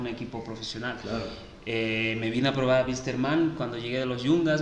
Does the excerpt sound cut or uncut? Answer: uncut